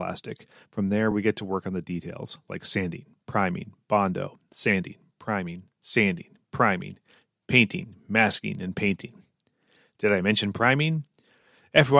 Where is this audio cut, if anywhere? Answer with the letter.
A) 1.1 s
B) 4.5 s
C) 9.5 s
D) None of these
D